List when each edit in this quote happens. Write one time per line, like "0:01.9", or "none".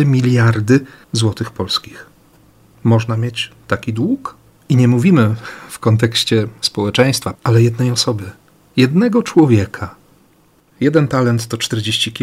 0:07.3
0:10.7